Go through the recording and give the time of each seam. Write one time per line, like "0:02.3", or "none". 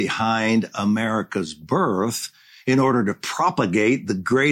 none